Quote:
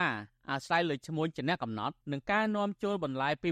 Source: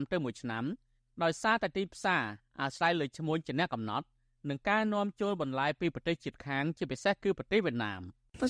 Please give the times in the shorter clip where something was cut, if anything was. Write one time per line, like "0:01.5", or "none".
0:02.0

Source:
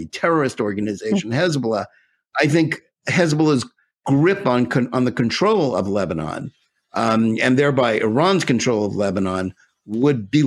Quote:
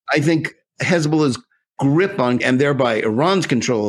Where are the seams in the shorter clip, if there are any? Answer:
0:02.4

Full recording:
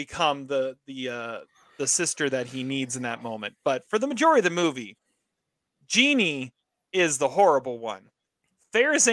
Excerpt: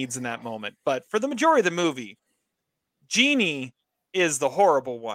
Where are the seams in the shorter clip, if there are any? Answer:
none

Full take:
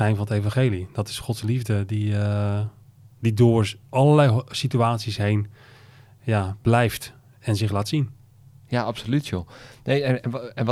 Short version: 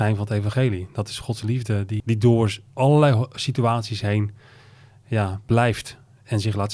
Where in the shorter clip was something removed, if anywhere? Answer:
0:02.0

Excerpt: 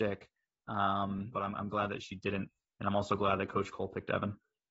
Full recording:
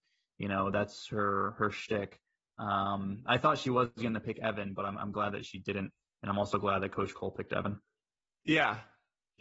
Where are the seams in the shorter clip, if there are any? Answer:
0:01.3

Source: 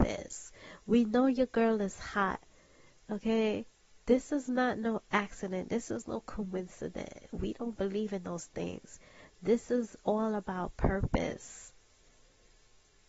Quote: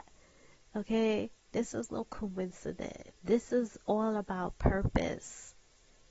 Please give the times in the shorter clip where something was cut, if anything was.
0:01.5
0:03.1

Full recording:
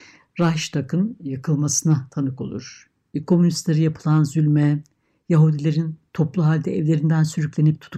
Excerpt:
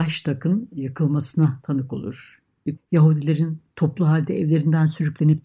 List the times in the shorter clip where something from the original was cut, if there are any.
0:02.8

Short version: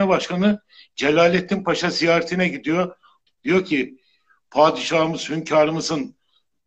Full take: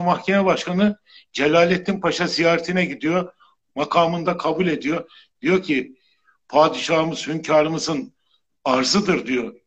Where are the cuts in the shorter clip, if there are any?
0:03.3

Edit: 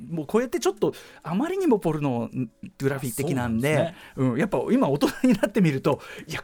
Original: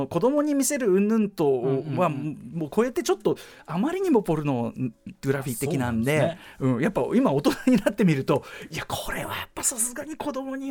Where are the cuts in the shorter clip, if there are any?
none

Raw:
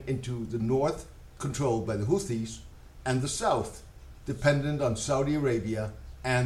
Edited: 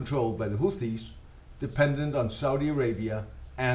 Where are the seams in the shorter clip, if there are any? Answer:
0:01.5

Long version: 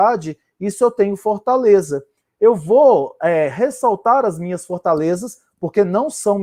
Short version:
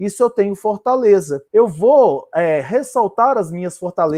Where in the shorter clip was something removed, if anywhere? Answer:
0:01.5

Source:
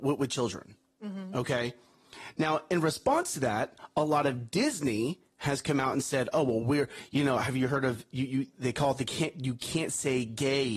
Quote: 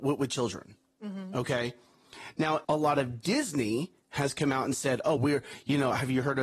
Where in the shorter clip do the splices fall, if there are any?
0:02.6
0:05.2

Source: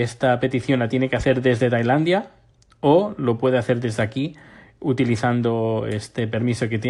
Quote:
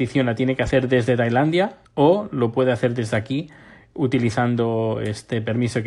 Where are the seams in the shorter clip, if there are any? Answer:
0:01.9

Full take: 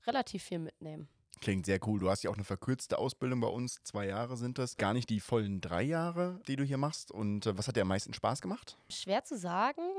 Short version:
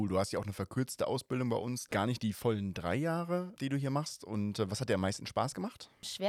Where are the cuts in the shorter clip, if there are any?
0:01.9

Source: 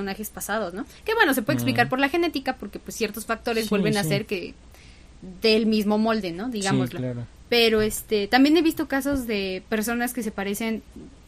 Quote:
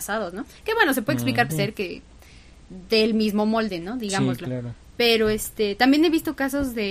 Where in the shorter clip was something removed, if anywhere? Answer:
0:01.5

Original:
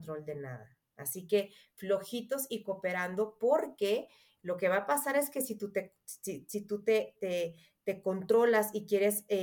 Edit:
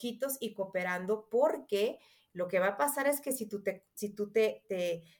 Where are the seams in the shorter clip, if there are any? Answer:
0:03.9

